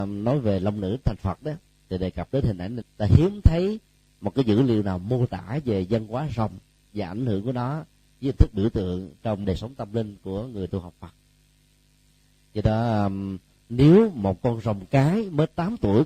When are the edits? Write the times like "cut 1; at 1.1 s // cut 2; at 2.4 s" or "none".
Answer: cut 1; at 2.8 s // cut 2; at 9.4 s